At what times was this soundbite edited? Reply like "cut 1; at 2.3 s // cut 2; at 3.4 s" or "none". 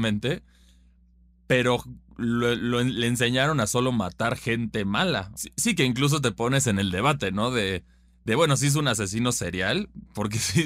cut 1; at 5.4 s